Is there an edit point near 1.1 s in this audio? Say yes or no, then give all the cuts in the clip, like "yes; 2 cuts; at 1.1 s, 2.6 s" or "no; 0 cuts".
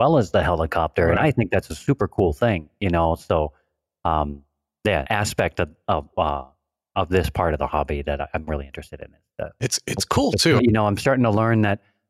no; 2 cuts; at 5.1 s, 10.6 s